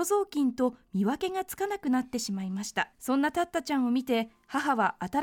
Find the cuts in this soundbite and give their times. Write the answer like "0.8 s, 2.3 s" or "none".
2.9 s